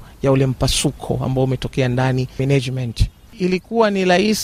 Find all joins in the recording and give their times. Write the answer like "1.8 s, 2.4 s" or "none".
3.3 s